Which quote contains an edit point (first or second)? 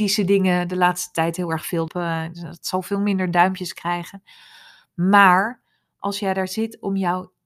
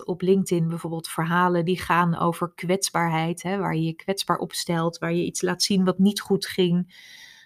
first